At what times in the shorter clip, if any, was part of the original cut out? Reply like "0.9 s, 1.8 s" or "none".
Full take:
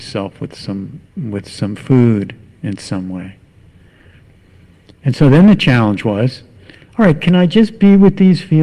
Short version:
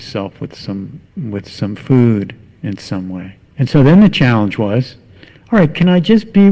3.5 s

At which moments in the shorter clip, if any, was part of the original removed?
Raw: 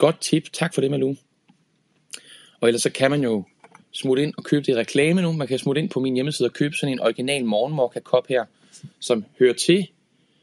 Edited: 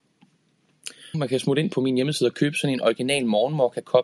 1.1 s

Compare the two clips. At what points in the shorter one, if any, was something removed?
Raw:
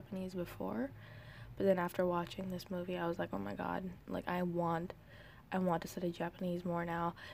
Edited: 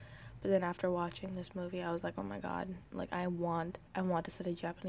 3.9 s

